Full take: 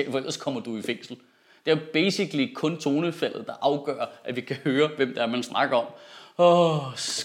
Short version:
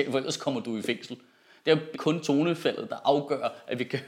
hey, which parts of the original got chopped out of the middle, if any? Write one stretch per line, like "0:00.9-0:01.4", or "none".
0:01.9-0:02.5